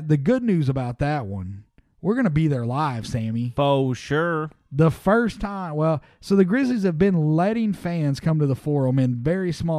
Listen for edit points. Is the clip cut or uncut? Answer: uncut